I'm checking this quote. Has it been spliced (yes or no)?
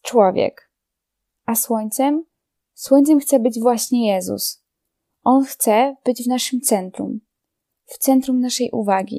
no